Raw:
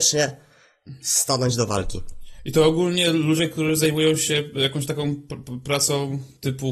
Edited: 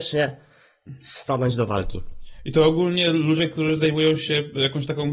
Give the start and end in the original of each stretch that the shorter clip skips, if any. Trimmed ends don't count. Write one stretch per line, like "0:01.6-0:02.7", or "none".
none